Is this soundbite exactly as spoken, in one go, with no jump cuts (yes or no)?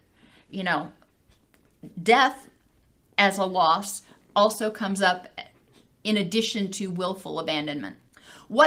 yes